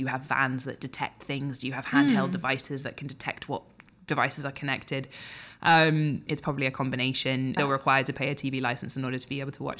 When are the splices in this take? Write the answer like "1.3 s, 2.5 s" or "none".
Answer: 6.3 s, 7.6 s